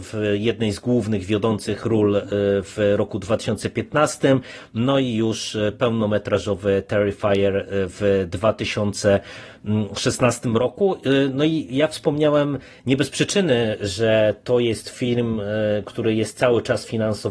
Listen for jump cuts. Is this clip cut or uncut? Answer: uncut